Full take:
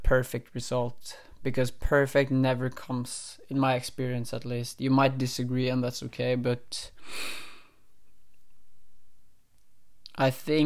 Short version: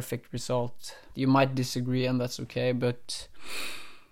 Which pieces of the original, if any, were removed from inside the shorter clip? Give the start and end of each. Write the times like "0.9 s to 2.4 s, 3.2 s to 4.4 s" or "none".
1.4 s to 4.8 s